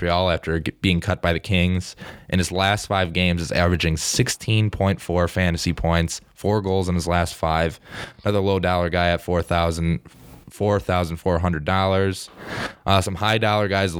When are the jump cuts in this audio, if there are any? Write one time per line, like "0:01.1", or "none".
none